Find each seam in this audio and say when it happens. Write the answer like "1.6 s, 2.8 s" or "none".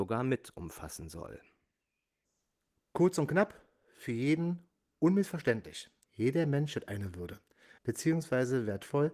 6.0 s, 7.8 s